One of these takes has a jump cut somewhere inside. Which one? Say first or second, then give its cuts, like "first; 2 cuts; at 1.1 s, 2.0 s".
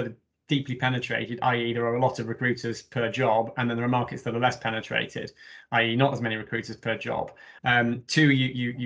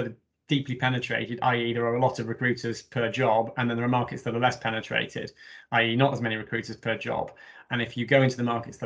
first; 1 cut; at 7.6 s